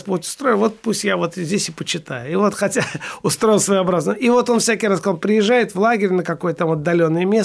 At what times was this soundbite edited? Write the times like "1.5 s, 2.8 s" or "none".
none